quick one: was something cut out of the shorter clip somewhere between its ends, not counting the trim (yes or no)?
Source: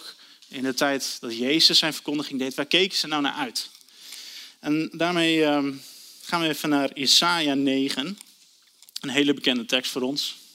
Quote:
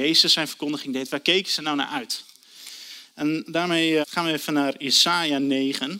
yes